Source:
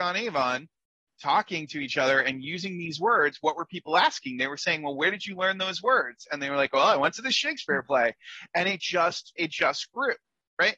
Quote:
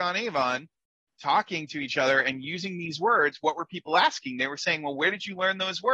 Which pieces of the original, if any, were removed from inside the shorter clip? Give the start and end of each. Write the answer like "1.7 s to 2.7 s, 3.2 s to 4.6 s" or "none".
none